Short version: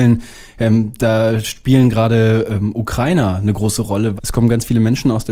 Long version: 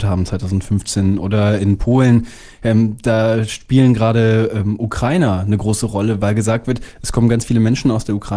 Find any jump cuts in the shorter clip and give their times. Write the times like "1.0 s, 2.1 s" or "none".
4.2 s